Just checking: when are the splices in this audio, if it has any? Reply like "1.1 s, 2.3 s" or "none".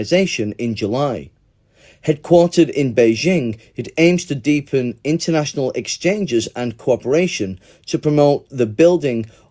none